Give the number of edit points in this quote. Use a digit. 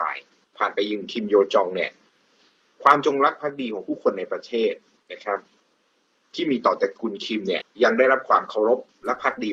1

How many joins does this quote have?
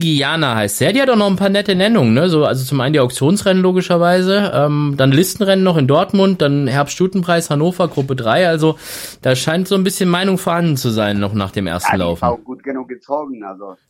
0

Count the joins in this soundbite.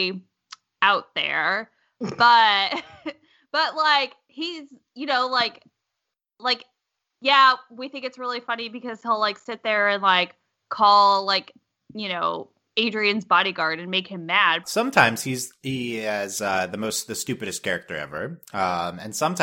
1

